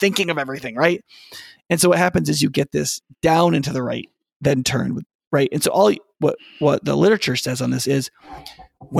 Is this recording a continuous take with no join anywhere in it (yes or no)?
yes